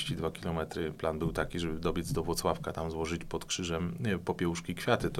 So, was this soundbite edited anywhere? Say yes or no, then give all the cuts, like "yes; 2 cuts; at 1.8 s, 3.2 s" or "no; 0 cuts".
no; 0 cuts